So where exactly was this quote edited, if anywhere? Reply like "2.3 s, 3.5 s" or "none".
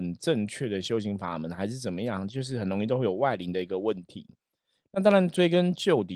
none